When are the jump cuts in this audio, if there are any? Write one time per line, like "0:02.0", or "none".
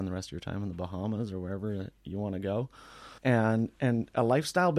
0:03.2